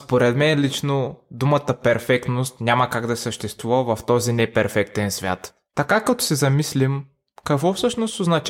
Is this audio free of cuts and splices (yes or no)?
yes